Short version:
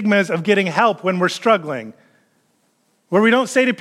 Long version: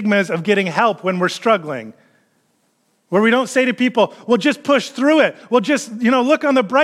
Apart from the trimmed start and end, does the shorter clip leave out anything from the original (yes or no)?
no